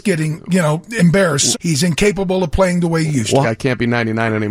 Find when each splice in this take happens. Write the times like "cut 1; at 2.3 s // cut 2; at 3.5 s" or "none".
cut 1; at 1.5 s // cut 2; at 3.4 s